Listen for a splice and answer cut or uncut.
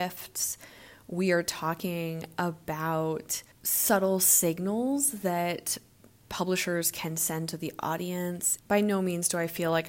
cut